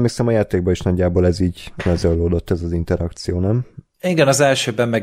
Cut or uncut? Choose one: uncut